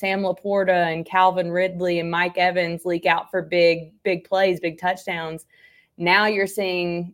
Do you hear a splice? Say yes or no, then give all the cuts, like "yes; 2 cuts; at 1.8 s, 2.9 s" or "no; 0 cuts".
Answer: no; 0 cuts